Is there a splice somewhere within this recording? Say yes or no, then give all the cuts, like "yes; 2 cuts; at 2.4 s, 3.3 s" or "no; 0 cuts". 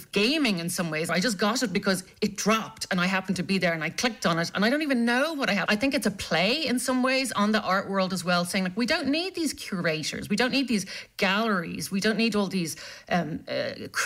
yes; 2 cuts; at 1.1 s, 5.7 s